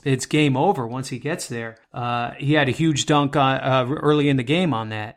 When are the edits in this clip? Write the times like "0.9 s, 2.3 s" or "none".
none